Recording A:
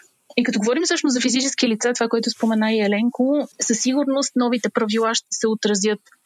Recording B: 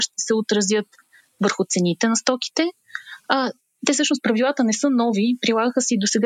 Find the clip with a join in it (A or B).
A